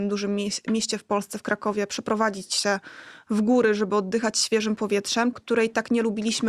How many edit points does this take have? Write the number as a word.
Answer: one